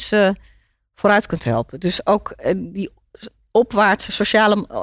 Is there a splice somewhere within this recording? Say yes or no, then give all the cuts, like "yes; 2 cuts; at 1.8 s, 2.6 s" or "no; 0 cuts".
no; 0 cuts